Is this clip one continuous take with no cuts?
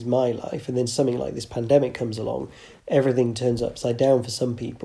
yes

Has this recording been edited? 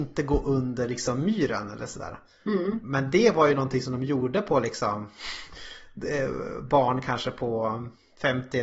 no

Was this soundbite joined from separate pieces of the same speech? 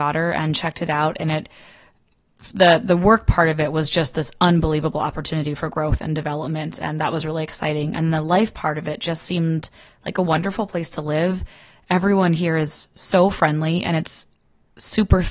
no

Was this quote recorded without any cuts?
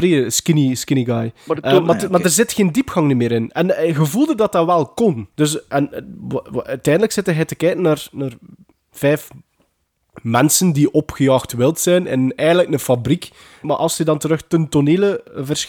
no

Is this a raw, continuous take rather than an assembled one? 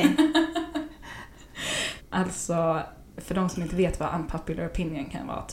no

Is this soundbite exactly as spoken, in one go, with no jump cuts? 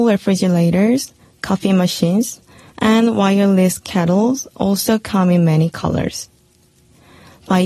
yes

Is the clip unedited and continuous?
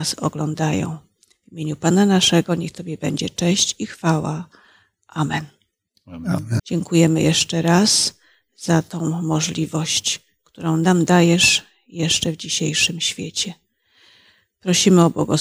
no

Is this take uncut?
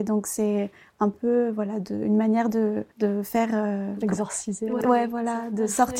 no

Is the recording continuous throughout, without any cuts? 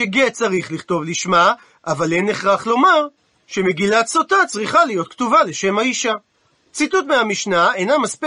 yes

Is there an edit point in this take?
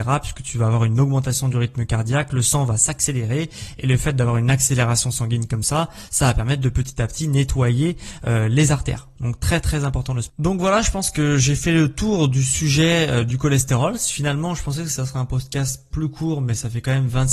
no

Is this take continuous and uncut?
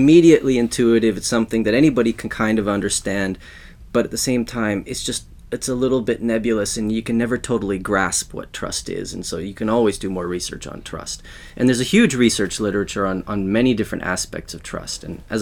yes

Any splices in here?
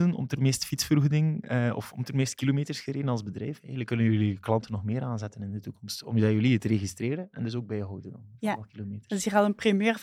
no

